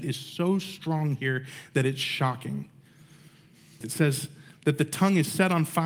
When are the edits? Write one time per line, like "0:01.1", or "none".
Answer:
0:03.8